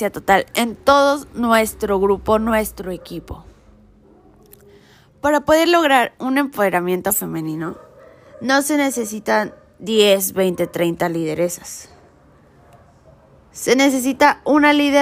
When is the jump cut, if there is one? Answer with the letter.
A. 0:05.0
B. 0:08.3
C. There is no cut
C